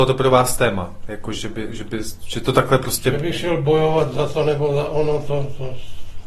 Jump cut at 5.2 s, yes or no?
no